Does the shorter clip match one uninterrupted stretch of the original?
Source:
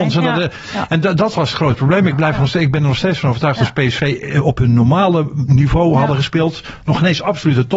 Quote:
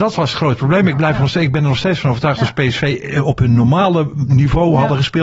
yes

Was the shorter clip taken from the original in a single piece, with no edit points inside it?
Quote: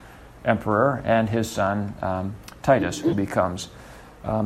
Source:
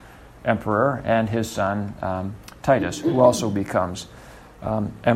no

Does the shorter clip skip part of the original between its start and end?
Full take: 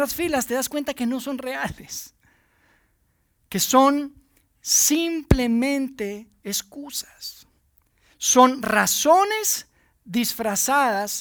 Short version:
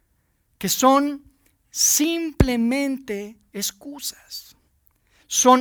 no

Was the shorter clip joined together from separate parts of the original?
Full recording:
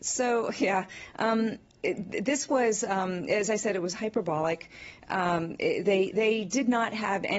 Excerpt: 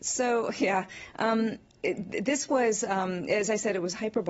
no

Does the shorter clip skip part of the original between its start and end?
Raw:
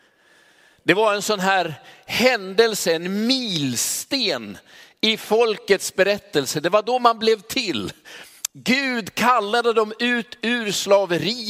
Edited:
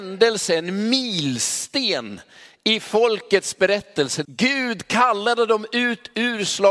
yes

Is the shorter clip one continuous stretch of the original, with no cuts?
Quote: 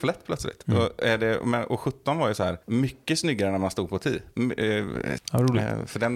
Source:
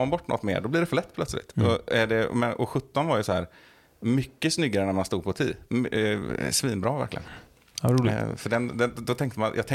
no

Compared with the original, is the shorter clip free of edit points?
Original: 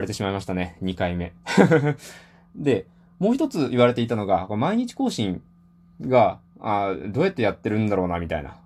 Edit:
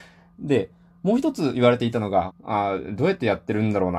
no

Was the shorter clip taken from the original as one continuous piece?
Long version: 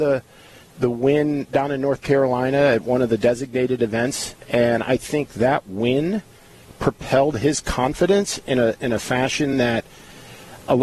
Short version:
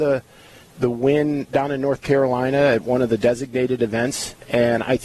yes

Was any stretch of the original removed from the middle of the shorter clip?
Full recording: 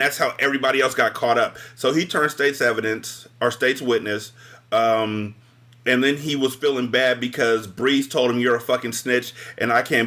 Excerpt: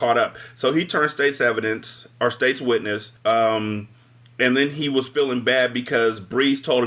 yes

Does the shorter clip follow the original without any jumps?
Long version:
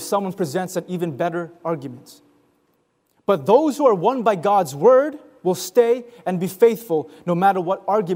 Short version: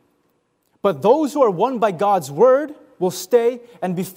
yes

